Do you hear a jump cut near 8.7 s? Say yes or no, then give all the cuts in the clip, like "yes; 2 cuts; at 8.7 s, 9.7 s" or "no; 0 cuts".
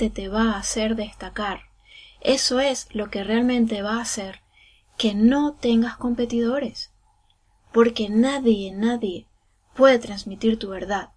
yes; 1 cut; at 8.7 s